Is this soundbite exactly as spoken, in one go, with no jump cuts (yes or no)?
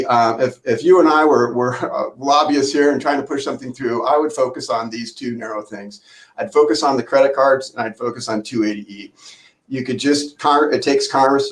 yes